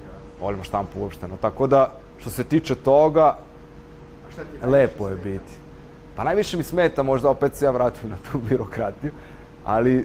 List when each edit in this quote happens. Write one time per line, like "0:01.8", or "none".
none